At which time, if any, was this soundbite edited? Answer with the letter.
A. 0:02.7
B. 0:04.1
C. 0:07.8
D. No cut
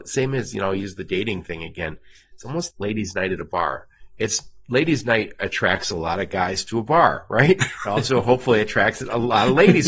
A